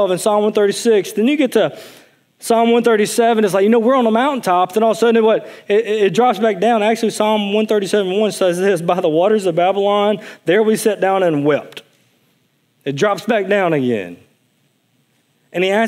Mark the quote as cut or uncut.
uncut